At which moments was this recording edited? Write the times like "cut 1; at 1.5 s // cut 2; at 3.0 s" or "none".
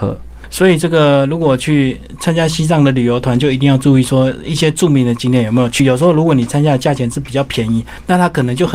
none